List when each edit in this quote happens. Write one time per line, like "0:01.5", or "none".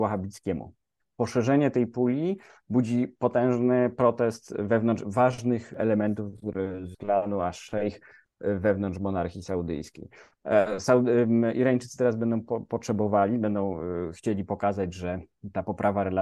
none